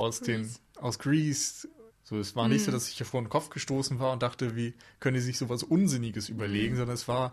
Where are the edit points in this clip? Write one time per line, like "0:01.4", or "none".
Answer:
0:01.9